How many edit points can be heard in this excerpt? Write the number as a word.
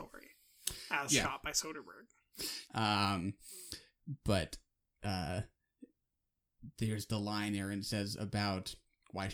one